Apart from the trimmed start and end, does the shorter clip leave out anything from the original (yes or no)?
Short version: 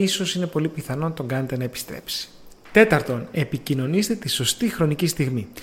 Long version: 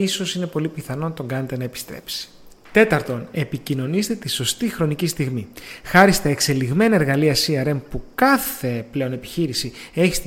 no